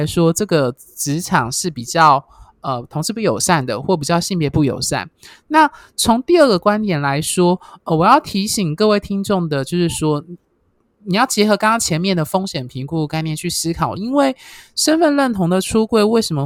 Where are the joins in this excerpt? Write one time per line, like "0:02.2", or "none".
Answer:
0:14.0